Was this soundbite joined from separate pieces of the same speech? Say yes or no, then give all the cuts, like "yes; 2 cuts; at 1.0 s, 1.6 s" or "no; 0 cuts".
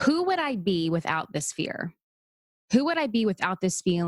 no; 0 cuts